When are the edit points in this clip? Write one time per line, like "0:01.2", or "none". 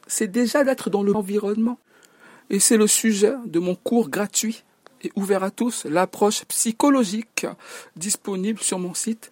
0:01.1